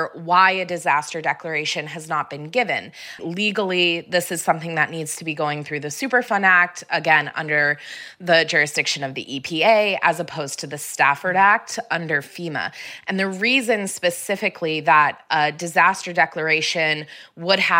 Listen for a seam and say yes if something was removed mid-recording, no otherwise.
yes